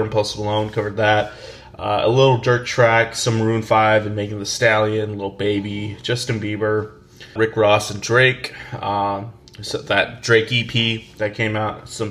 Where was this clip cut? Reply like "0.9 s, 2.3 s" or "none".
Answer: 7.4 s